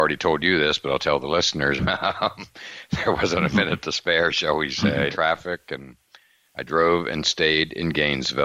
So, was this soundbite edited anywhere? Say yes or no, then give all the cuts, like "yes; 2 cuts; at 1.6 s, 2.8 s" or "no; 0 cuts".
yes; 2 cuts; at 1.8 s, 5.1 s